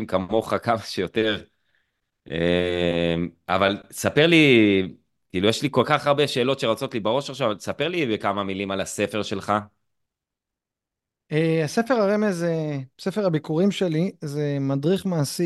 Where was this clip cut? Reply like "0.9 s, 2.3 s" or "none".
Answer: none